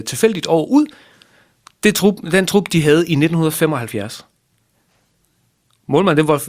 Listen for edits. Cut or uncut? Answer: uncut